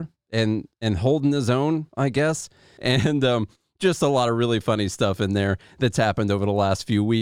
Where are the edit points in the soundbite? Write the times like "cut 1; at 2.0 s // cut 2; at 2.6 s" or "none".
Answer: cut 1; at 2.8 s

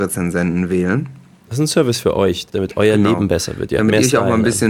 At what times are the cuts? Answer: cut 1; at 2.5 s

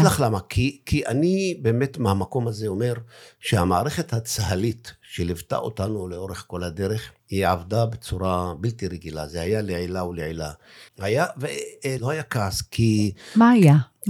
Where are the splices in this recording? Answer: cut 1; at 7.2 s // cut 2; at 10.9 s // cut 3; at 12.0 s

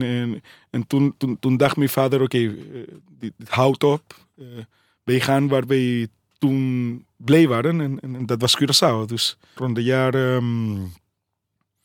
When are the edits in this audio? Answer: cut 1; at 9.6 s

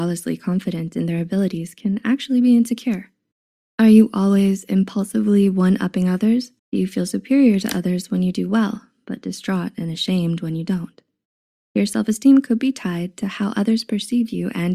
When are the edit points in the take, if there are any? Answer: cut 1; at 6.6 s

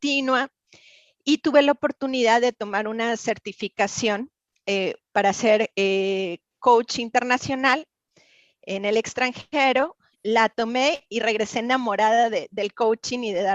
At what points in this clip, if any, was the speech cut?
none

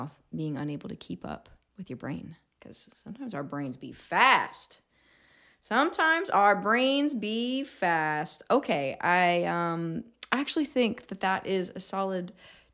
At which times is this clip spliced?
none

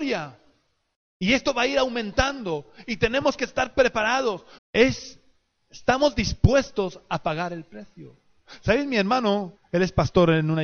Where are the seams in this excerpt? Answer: cut 1; at 4.6 s // cut 2; at 9.6 s

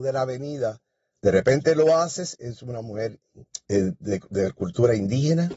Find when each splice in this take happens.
cut 1; at 1.1 s // cut 2; at 3.6 s

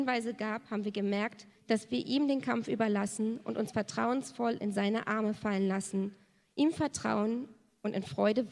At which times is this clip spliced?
cut 1; at 1.6 s

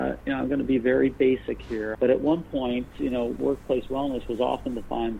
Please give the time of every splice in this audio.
cut 1; at 1.9 s

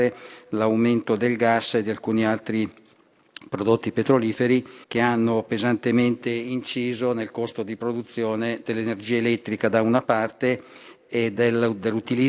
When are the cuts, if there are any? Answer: cut 1; at 4.8 s

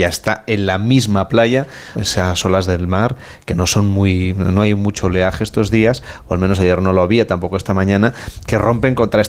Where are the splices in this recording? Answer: cut 1; at 1.9 s

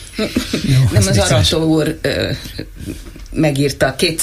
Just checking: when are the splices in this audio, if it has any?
none

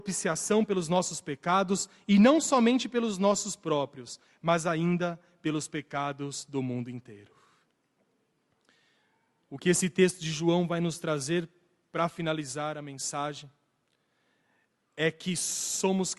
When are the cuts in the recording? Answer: none

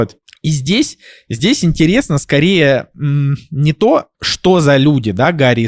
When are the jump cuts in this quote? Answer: cut 1; at 4.1 s

